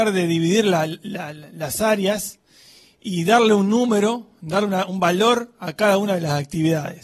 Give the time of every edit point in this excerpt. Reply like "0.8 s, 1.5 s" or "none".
4.9 s